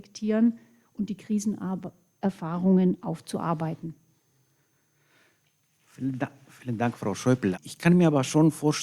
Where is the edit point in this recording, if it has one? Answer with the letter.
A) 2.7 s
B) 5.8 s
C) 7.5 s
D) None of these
C